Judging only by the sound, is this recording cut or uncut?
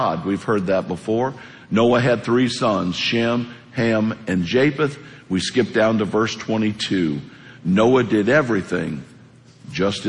uncut